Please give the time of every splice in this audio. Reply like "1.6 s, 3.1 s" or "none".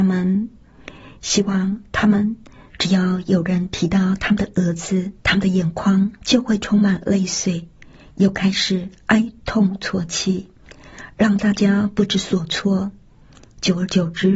2.7 s, 5.2 s

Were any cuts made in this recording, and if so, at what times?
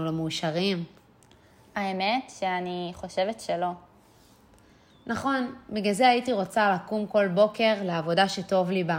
none

